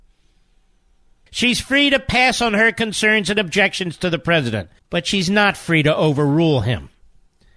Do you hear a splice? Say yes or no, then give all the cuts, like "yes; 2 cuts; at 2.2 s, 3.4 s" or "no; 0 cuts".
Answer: yes; 2 cuts; at 1.3 s, 4.8 s